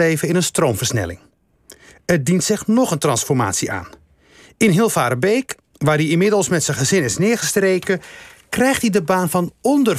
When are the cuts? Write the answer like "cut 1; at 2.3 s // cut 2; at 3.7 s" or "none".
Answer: none